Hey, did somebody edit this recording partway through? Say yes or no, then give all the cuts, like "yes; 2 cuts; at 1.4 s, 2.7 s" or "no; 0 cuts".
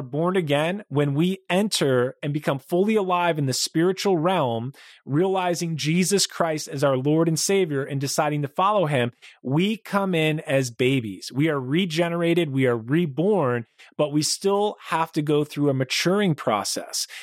no; 0 cuts